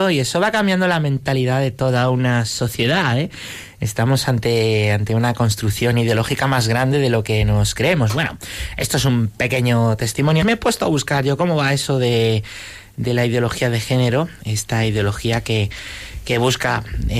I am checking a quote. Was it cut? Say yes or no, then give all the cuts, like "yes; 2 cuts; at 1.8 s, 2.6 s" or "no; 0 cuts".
yes; 1 cut; at 10.4 s